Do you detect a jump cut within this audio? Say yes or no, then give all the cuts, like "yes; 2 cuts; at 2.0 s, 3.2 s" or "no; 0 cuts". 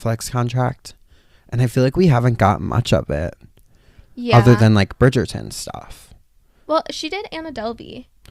no; 0 cuts